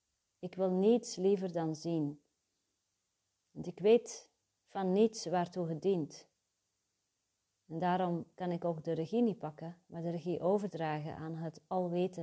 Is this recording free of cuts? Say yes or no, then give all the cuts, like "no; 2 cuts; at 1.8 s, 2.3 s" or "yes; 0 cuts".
yes; 0 cuts